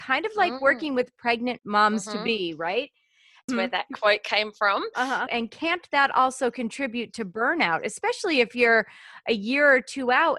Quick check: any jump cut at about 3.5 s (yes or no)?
yes